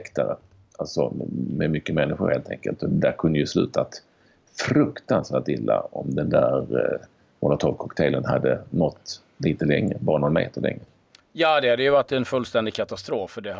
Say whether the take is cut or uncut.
uncut